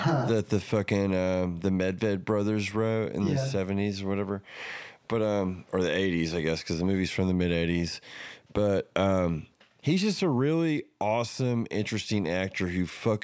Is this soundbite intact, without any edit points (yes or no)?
yes